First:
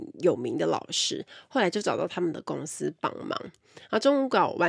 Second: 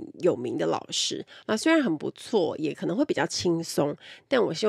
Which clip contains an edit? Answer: second; 1 cut; at 1.4 s

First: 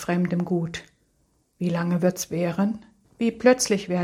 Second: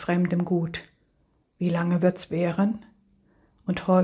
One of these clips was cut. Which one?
first; 1 cut; at 3.0 s

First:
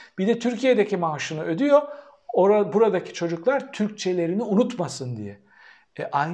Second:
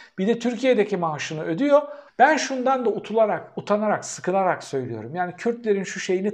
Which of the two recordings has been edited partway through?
second; 1 cut; at 2.1 s

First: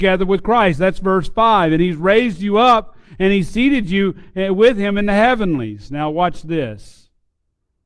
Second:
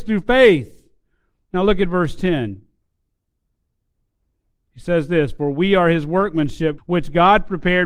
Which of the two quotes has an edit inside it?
second; 1 cut; at 6.8 s

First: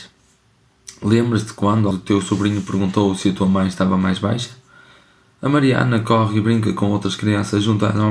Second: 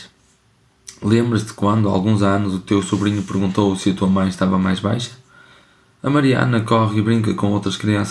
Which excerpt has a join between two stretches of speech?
first; 1 cut; at 1.9 s

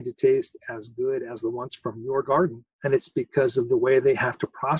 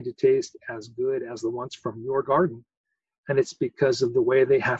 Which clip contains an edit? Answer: first; 1 cut; at 2.7 s

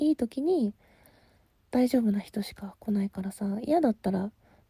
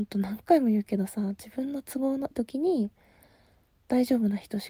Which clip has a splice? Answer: second; 1 cut; at 2.3 s

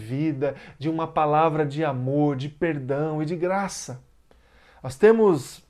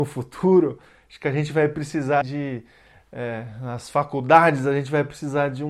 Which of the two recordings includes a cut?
second; 1 cut; at 2.2 s

